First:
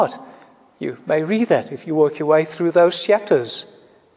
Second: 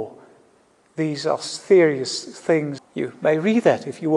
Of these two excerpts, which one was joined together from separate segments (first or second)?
second